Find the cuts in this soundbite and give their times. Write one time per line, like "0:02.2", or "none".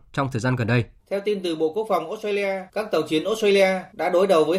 0:01.0
0:02.7